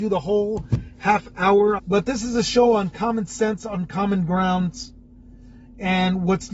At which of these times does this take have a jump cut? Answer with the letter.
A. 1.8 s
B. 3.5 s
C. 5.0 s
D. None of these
A